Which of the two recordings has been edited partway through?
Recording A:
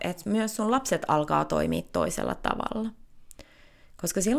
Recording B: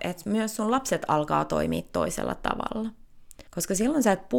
B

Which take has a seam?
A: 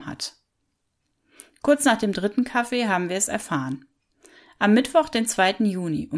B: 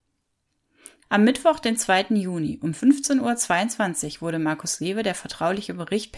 B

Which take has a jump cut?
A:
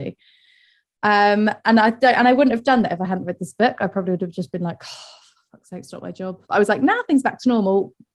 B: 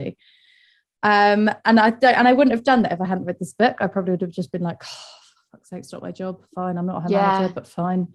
A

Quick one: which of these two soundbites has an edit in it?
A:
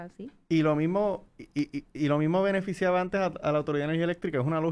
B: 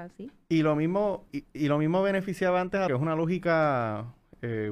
B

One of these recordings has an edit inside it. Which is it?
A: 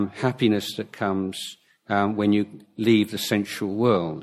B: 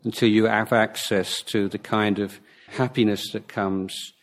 B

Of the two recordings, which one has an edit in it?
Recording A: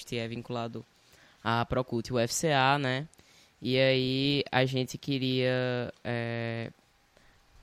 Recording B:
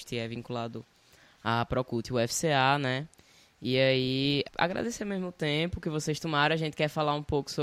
B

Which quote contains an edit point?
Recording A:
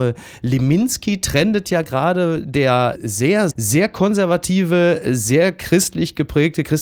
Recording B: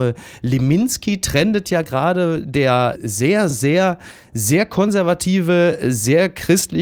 A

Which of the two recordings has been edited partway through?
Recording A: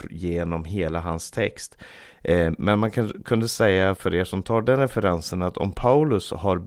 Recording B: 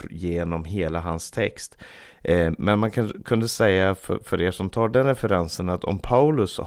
A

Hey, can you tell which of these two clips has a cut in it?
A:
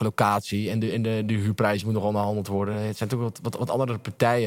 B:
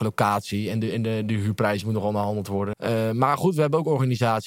B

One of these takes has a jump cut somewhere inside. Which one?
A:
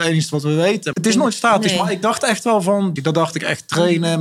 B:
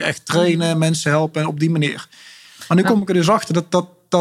A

